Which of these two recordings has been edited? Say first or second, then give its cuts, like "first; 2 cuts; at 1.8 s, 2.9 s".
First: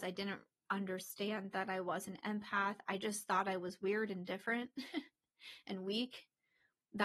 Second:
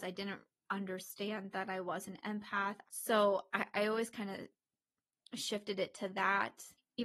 second; 1 cut; at 2.8 s